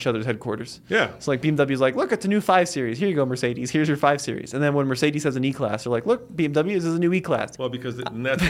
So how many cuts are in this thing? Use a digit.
1